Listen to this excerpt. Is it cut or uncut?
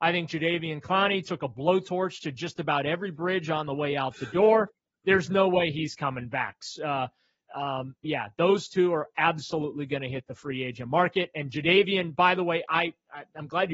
cut